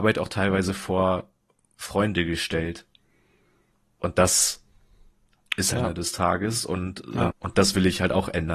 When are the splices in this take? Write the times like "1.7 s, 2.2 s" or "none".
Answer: 5.7 s, 7.3 s